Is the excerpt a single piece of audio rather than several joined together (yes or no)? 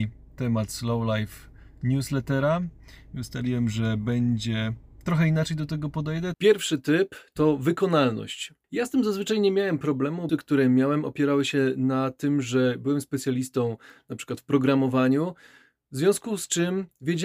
no